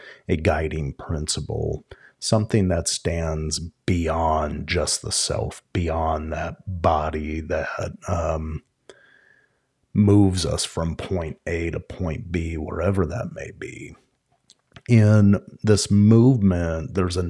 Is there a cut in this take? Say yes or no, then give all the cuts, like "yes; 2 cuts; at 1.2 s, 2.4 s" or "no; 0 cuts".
no; 0 cuts